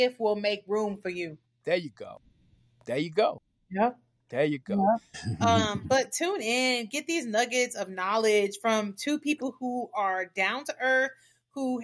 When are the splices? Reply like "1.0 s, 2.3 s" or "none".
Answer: 5.1 s